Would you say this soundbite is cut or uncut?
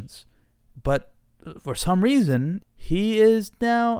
cut